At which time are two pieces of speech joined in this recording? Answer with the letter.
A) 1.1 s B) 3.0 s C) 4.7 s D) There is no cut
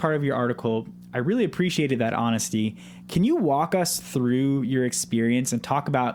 D